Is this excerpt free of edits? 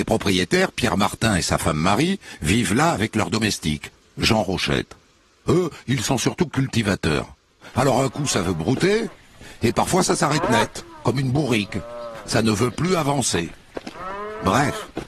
no; 2 cuts; at 7.7 s, 9.6 s

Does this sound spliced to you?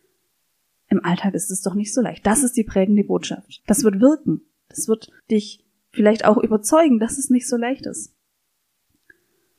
yes; 2 cuts; at 3.6 s, 5.2 s

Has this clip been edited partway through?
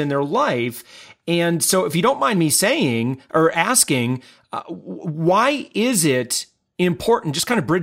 no; 0 cuts

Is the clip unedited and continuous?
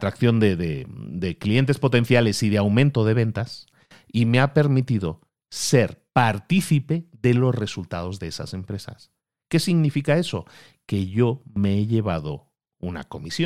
yes; 0 cuts

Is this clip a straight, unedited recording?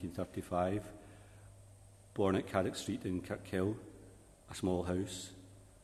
yes; 0 cuts

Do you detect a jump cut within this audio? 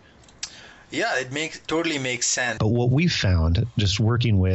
yes; 1 cut; at 2.6 s

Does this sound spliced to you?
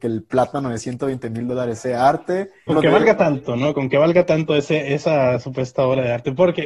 yes; 1 cut; at 2.7 s

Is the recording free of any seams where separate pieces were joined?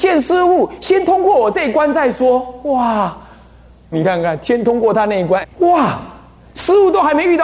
no; 2 cuts; at 3.9 s, 5.4 s

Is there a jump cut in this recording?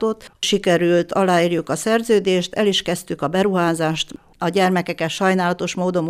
no; 0 cuts

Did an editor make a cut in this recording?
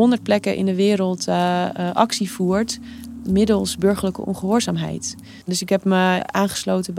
yes; 1 cut; at 5.4 s

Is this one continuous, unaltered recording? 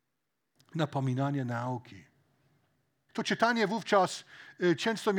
no; 1 cut; at 3.1 s

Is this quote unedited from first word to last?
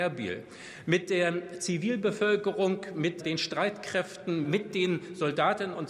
no; 2 cuts; at 3.2 s, 4.4 s

